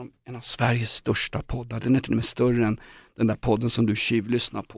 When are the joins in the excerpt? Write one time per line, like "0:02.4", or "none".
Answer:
none